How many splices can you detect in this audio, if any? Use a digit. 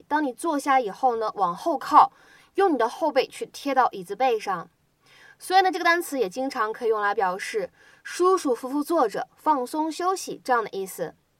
0